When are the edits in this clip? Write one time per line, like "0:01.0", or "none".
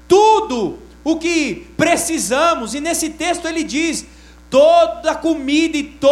none